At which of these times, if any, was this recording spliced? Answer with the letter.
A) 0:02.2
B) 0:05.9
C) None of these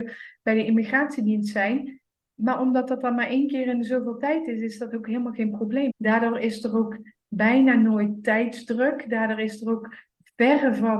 B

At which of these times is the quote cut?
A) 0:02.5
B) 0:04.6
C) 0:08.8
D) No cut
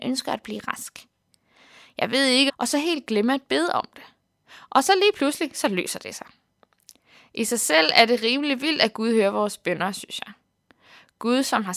A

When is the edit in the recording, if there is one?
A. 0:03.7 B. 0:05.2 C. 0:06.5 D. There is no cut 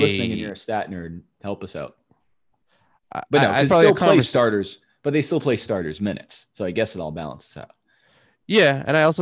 A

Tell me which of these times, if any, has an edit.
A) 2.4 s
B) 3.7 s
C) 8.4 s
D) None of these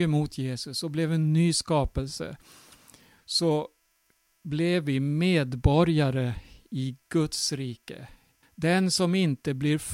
C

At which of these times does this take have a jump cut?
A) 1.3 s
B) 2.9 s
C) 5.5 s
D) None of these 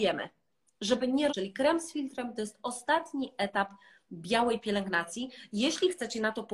A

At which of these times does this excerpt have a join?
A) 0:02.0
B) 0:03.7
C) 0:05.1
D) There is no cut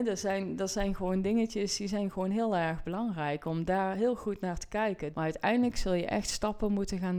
C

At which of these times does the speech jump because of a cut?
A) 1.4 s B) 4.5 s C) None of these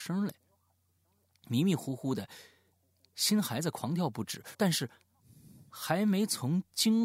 B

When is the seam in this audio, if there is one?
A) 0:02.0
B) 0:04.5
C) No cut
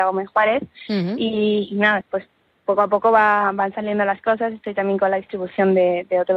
A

